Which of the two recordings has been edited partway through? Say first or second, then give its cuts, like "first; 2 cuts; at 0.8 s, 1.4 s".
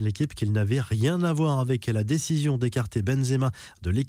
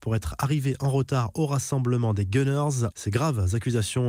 second; 1 cut; at 2.9 s